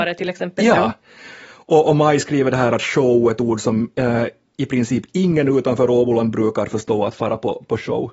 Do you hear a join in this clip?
no; 0 cuts

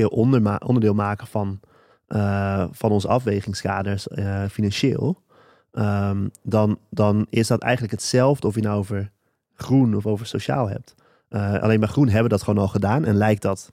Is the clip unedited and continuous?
yes; 0 cuts

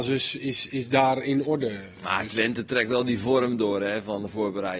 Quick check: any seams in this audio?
no; 0 cuts

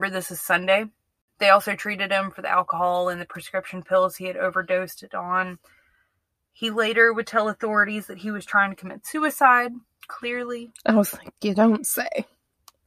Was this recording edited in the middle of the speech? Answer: no; 0 cuts

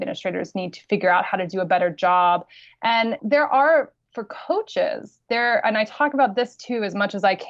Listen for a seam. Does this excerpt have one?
yes; 1 cut; at 3.2 s

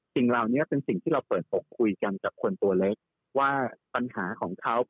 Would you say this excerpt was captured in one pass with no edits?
no; 1 cut; at 3.8 s

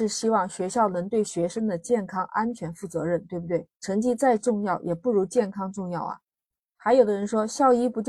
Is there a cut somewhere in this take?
yes; 2 cuts; at 3.7 s, 6.6 s

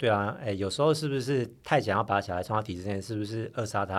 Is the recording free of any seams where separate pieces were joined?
yes; 0 cuts

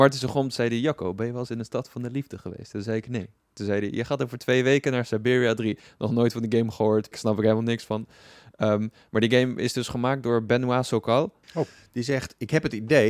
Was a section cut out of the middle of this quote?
yes; 2 cuts; at 7.1 s, 11.4 s

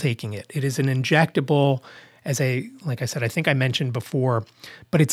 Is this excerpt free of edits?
yes; 0 cuts

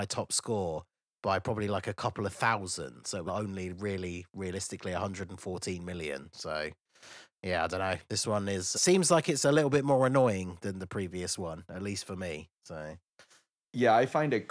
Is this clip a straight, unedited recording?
no; 2 cuts; at 3.3 s, 8.7 s

